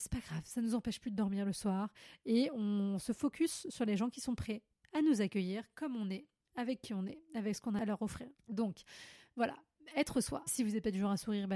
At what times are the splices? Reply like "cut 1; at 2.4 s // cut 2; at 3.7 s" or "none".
cut 1; at 8.4 s // cut 2; at 10.5 s